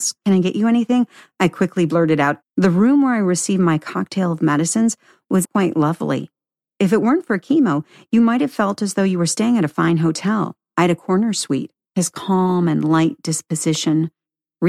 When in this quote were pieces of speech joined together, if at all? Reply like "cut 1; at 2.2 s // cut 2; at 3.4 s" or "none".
cut 1; at 2.4 s // cut 2; at 5.4 s // cut 3; at 11.8 s